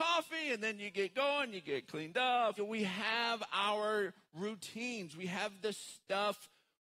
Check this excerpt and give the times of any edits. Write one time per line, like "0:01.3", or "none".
0:02.6